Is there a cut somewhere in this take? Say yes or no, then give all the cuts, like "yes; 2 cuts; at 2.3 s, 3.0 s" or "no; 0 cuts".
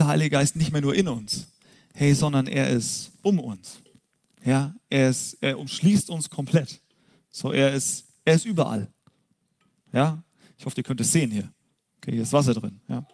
no; 0 cuts